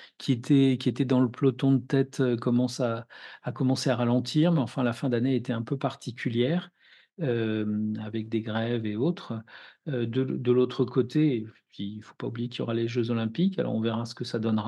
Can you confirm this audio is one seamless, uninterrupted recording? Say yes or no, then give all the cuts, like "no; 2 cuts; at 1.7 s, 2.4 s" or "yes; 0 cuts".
yes; 0 cuts